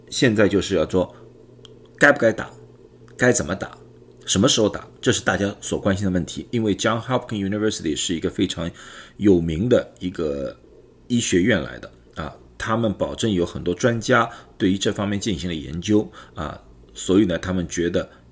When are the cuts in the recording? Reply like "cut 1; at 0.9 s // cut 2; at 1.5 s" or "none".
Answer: cut 1; at 6.5 s